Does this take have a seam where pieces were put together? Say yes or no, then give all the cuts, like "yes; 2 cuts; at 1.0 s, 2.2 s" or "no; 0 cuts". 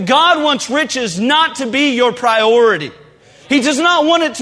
no; 0 cuts